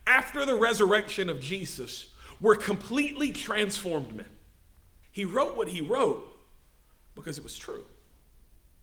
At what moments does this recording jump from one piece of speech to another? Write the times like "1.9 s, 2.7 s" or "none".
5.0 s